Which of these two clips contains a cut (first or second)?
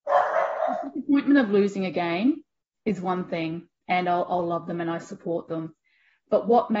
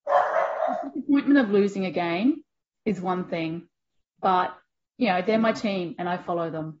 first